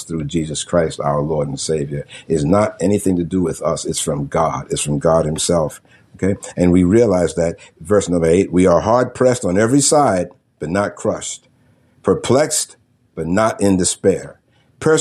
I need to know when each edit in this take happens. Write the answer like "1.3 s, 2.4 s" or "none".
none